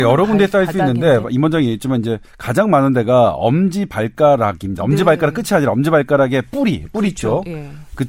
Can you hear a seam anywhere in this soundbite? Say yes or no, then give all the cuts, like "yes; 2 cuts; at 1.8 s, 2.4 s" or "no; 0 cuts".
no; 0 cuts